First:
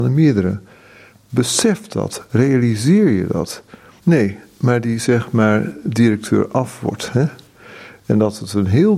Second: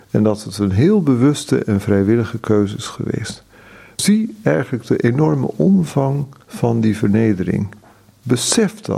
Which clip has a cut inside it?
first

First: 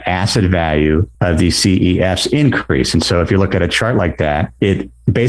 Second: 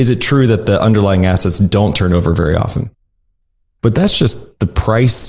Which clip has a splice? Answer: second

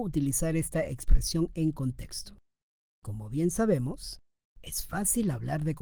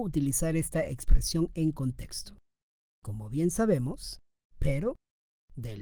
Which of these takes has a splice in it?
second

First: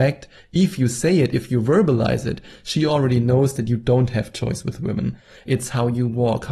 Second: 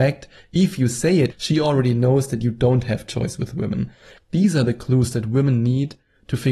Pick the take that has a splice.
second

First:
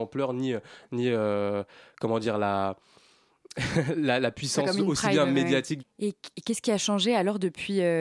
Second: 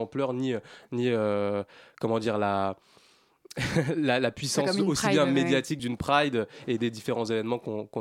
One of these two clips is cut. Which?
first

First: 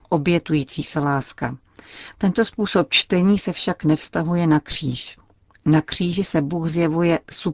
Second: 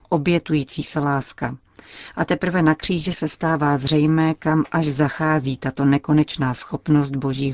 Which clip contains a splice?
first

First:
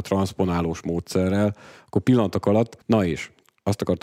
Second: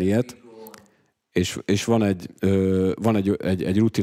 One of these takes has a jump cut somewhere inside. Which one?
first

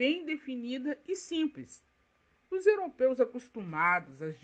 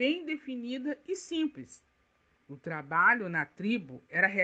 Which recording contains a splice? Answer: second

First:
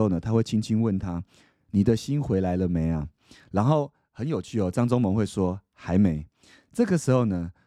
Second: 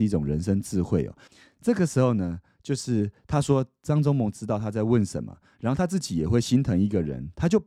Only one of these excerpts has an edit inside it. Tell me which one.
second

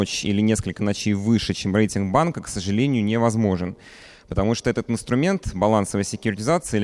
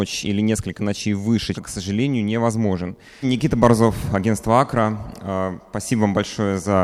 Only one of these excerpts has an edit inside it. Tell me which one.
second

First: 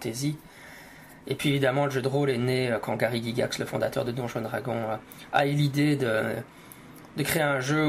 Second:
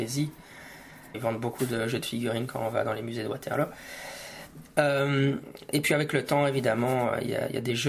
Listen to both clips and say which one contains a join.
second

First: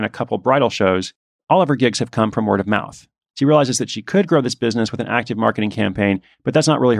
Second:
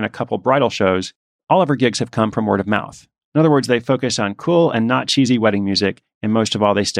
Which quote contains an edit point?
second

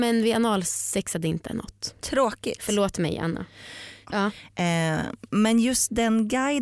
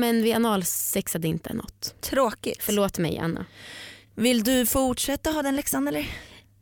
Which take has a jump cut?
first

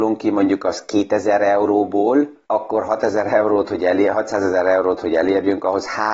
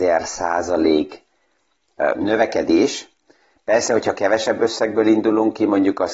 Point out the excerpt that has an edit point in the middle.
first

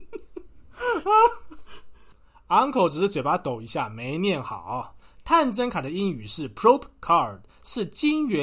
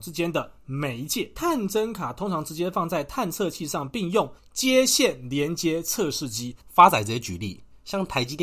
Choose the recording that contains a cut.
second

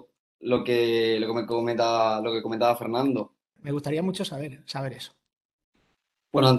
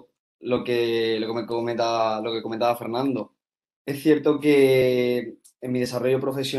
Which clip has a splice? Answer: first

